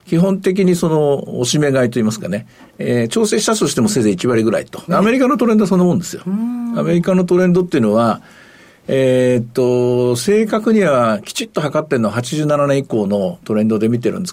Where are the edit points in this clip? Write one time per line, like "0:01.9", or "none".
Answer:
0:04.9